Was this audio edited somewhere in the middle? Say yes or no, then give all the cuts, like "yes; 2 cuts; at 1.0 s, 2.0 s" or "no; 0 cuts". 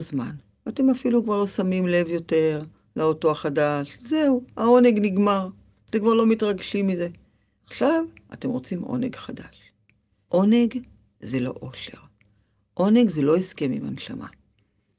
yes; 1 cut; at 10.3 s